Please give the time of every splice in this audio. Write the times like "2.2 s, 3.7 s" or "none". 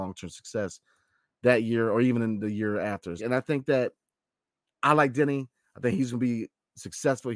3.2 s